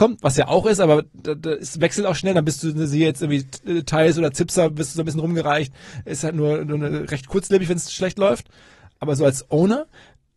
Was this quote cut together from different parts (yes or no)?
no